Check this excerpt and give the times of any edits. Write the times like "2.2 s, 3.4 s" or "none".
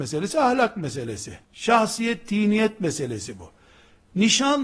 1.4 s